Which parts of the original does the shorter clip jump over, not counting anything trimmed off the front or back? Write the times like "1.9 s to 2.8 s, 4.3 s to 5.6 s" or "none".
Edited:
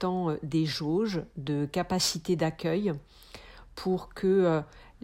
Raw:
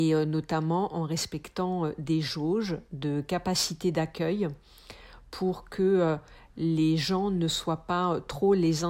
none